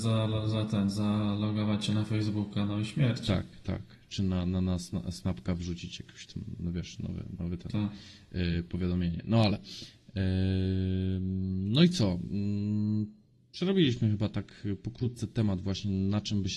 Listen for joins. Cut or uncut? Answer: uncut